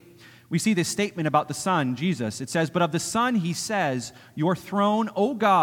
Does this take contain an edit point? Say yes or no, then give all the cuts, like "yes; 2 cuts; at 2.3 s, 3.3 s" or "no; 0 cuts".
no; 0 cuts